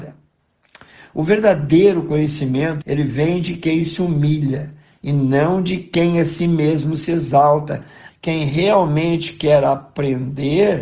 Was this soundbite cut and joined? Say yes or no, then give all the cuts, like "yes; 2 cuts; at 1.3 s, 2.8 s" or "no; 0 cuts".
yes; 2 cuts; at 2.8 s, 8.1 s